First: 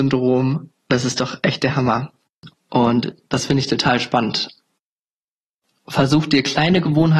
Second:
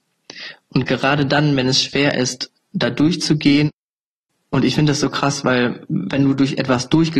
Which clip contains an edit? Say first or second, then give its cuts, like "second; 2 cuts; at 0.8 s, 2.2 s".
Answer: first; 1 cut; at 2.5 s